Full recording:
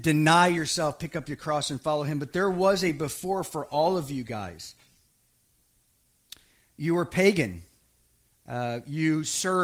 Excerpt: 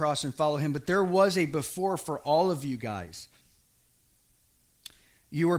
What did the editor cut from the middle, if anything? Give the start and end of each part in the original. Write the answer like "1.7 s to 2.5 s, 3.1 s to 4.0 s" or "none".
none